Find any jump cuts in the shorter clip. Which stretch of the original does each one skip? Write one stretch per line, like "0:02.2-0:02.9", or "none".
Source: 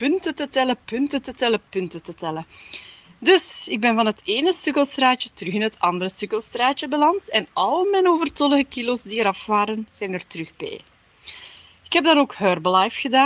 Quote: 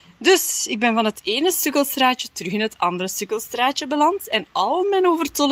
none